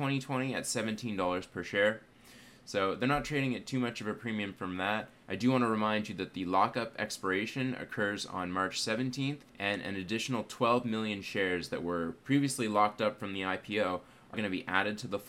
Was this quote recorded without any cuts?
no; 3 cuts; at 5.2 s, 9.5 s, 14.3 s

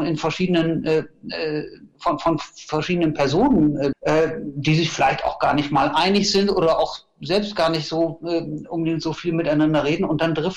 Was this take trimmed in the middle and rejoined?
yes; 1 cut; at 3.9 s

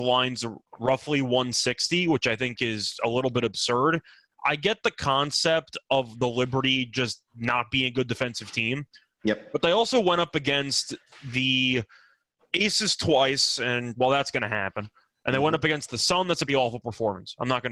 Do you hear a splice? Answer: yes; 1 cut; at 16.5 s

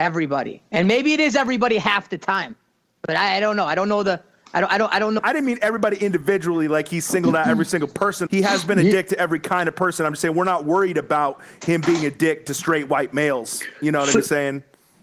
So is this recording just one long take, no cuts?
no; 2 cuts; at 5.2 s, 8.3 s

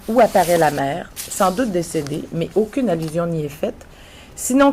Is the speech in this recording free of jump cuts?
yes; 0 cuts

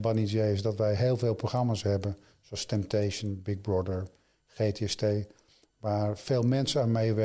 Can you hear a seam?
no; 0 cuts

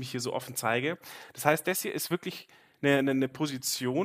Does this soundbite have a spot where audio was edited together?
no; 0 cuts

